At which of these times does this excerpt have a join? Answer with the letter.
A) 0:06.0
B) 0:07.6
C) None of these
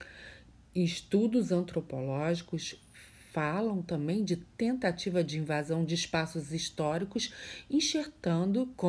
C